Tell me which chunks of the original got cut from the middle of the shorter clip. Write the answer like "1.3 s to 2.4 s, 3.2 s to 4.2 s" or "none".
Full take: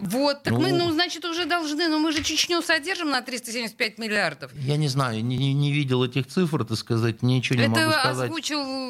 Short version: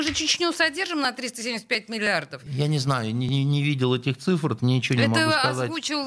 6.7 s to 7.2 s

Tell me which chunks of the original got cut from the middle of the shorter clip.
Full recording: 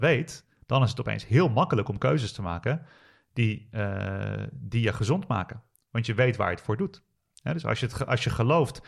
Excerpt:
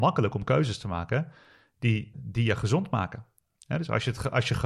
3.7 s to 4.5 s, 5.8 s to 7.1 s

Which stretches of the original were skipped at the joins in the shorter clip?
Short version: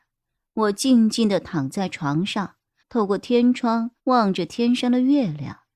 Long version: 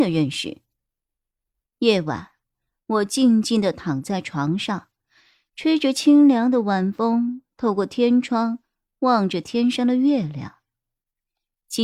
5.1 s to 7.5 s, 8.7 s to 8.9 s

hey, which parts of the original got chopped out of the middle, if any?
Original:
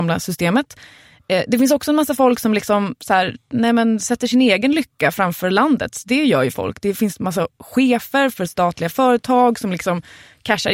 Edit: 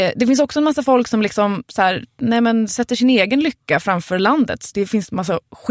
6.0 s to 6.8 s

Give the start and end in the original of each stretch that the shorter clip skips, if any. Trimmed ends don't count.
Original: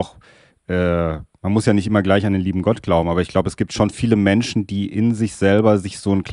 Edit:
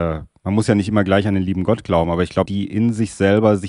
3.4 s to 4.7 s

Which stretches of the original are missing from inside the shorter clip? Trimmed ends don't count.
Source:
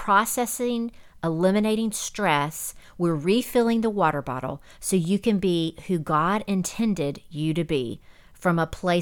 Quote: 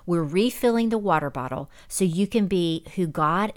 none

